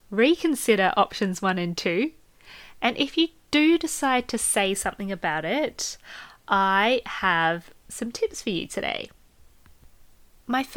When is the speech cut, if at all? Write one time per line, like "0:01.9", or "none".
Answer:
none